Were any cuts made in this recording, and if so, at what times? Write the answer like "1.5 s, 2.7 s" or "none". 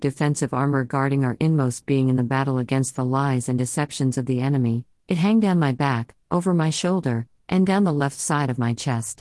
none